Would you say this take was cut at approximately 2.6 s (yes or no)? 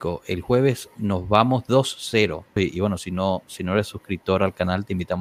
yes